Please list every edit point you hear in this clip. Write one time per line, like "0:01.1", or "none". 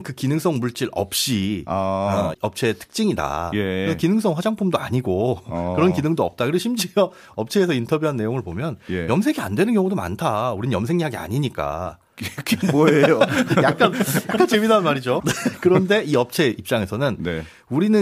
0:02.3
0:15.2